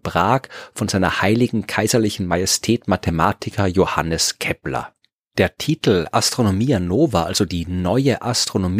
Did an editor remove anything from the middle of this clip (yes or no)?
no